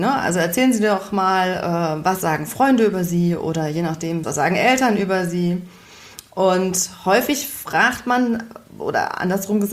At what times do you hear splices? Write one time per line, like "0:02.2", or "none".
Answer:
0:04.2